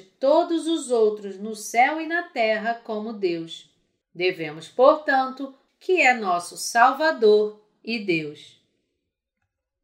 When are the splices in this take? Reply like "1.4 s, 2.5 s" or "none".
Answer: 4.0 s, 5.7 s

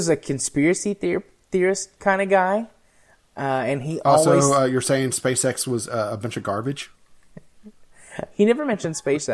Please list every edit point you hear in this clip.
none

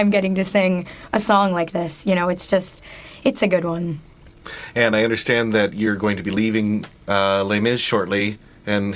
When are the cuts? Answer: none

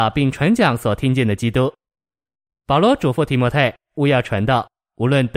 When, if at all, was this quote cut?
none

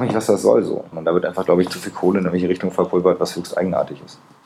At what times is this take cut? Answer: 0.9 s

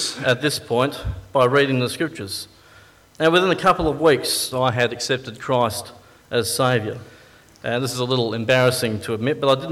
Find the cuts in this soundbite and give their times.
3.1 s, 4.5 s

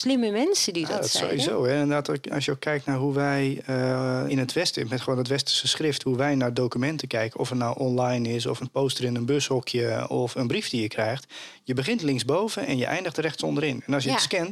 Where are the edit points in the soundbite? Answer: 4.3 s, 8.6 s

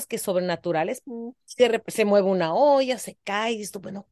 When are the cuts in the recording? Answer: 1.0 s

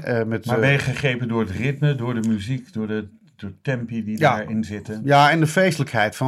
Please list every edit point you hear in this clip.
none

